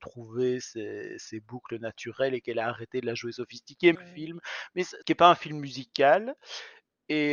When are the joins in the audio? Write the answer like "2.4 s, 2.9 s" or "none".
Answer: 3.9 s, 5.0 s

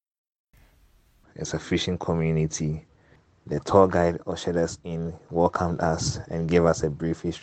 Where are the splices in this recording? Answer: 1.2 s

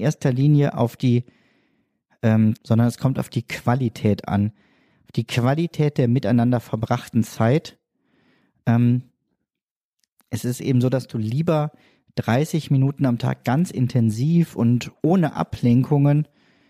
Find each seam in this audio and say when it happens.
2.6 s

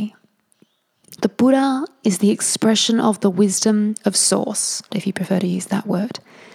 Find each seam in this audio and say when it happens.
4.9 s

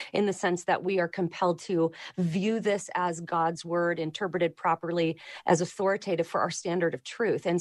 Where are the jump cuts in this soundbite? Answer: none

